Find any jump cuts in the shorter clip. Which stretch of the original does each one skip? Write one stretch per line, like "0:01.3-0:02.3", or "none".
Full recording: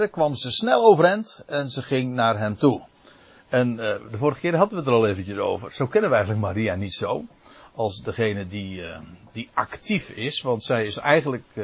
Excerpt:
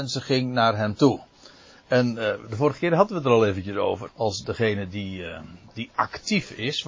0:05.7-0:07.7